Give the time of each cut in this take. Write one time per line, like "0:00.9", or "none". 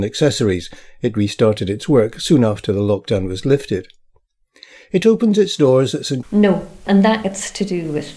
0:06.2